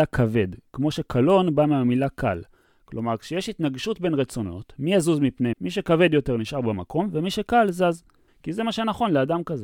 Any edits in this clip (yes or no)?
yes